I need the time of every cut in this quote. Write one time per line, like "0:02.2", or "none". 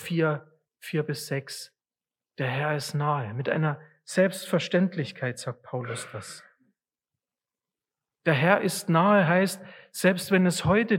none